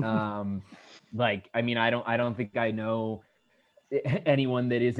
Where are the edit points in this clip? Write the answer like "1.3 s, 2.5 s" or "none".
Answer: none

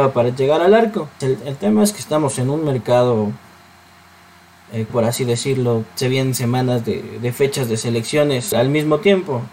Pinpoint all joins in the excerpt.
1.2 s, 4.9 s, 8.5 s

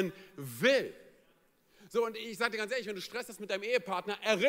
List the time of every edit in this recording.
none

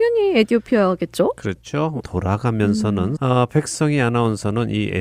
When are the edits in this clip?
2.0 s, 3.2 s

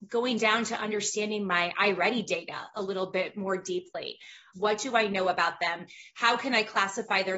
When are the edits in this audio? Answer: 4.5 s

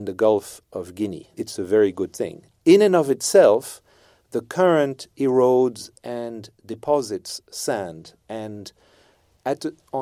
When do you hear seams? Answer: 1.3 s

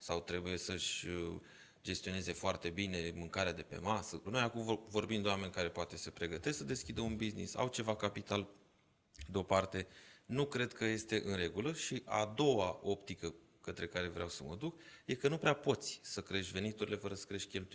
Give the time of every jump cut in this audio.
4.2 s

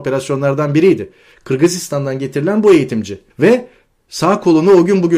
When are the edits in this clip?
3.3 s

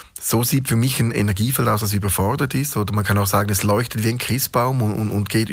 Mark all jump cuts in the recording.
none

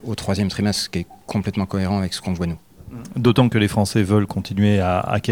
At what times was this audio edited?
none

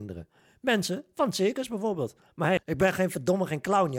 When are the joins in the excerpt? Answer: 2.6 s

